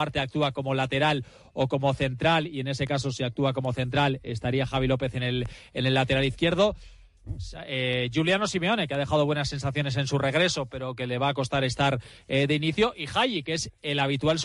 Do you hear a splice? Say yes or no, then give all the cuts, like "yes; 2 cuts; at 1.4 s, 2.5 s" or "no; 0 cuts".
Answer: no; 0 cuts